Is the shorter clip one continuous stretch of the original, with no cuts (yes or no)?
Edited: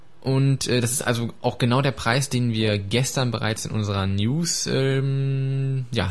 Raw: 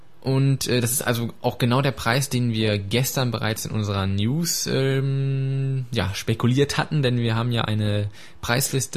yes